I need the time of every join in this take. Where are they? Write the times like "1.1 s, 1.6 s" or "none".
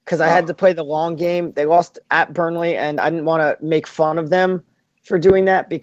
none